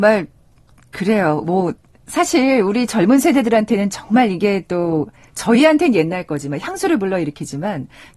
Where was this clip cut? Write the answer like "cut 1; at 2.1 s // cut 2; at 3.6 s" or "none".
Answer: none